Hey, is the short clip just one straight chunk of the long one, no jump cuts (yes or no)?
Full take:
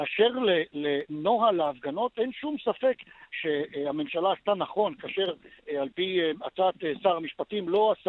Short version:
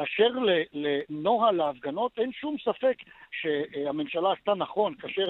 yes